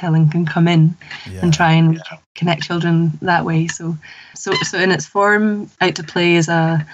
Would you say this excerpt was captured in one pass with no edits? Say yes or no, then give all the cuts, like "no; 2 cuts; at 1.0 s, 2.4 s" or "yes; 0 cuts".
no; 2 cuts; at 4.3 s, 5.8 s